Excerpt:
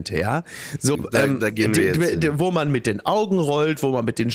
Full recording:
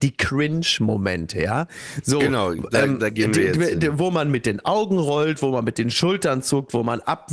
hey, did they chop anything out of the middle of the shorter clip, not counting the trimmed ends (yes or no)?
yes